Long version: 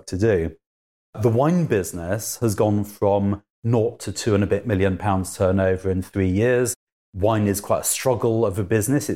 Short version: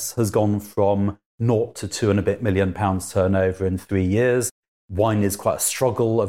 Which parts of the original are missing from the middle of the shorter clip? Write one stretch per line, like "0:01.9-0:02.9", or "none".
none